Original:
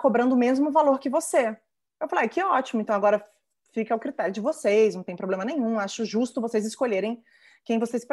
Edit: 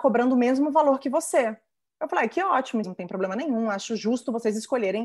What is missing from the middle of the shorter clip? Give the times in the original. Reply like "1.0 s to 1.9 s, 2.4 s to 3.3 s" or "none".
2.8 s to 4.9 s